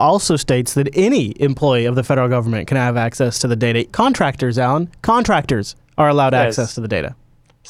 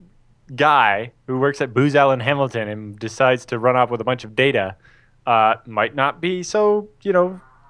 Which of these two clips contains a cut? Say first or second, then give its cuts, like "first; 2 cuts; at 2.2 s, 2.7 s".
first; 1 cut; at 3.9 s